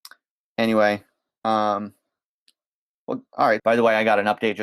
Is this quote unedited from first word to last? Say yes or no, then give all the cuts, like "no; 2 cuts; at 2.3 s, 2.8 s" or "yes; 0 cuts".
no; 1 cut; at 3.6 s